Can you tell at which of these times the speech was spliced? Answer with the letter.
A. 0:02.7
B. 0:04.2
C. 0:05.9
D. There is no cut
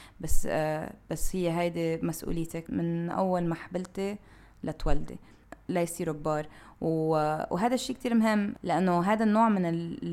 A